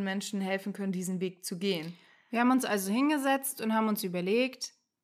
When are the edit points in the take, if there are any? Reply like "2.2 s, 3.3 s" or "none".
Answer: none